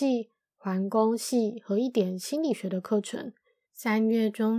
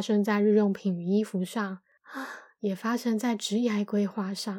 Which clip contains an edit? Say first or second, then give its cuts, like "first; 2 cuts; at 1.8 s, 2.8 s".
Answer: first; 1 cut; at 3.7 s